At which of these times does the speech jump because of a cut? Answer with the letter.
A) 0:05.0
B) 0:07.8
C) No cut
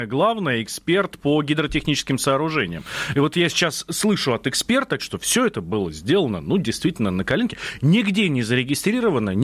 A